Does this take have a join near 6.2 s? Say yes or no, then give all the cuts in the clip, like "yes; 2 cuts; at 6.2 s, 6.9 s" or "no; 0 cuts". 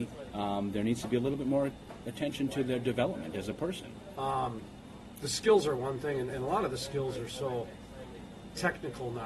no; 1 cut; at 4.1 s